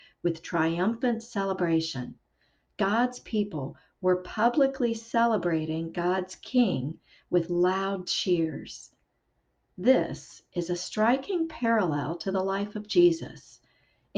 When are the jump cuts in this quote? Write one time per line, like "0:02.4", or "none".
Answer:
none